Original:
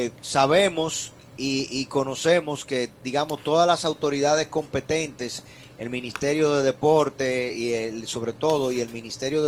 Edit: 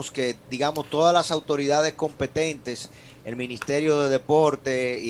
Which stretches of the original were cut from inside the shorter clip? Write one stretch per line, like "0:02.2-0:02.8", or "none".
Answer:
none